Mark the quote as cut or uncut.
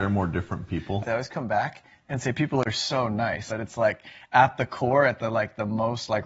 cut